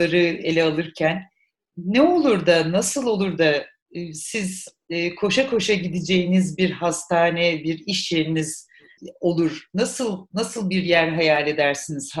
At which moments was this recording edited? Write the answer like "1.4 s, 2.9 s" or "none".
none